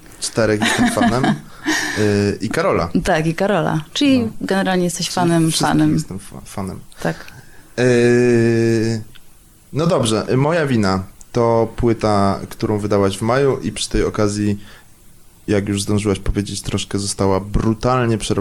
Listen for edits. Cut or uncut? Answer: uncut